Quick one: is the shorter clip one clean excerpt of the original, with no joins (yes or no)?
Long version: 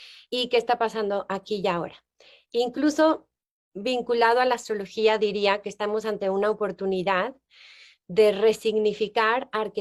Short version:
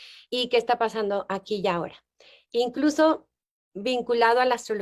yes